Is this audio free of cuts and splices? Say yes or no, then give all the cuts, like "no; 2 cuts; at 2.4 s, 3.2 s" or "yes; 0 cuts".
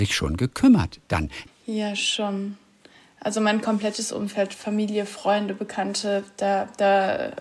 no; 1 cut; at 1.5 s